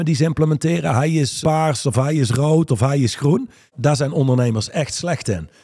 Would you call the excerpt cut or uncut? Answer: cut